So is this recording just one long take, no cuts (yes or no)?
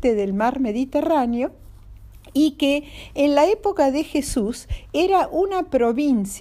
yes